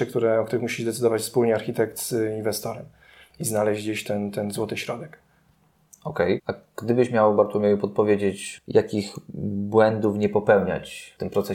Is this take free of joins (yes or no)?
no